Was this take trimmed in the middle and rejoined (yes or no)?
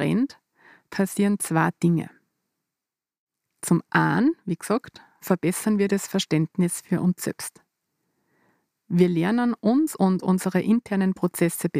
no